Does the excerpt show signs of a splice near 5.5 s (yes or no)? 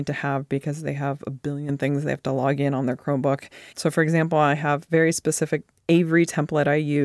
no